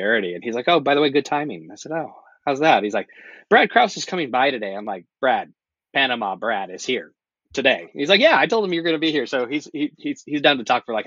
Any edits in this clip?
no; 0 cuts

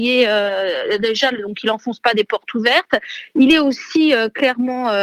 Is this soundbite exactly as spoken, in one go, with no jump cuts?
yes; 0 cuts

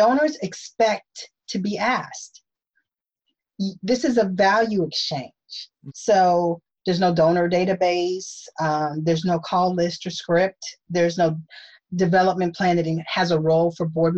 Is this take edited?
yes; 1 cut; at 5.9 s

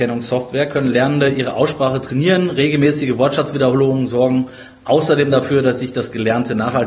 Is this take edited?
no; 0 cuts

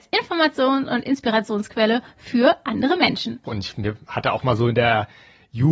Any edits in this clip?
yes; 1 cut; at 3.5 s

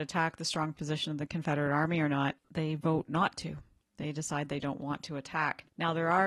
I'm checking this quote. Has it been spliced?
yes; 1 cut; at 2.4 s

